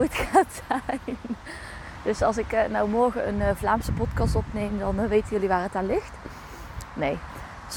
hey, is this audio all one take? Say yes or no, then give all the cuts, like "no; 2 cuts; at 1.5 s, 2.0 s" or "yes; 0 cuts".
yes; 0 cuts